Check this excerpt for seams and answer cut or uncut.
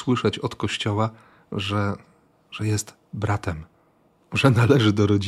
uncut